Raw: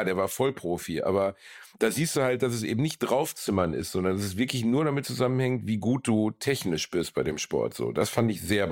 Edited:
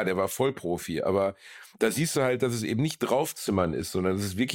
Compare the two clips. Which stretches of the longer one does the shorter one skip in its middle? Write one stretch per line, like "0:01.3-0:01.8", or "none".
none